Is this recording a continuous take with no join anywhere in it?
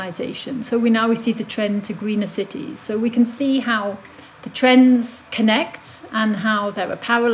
yes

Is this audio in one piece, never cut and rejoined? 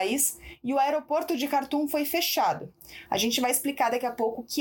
no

